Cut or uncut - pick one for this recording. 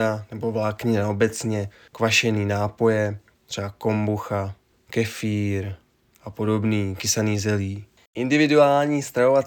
uncut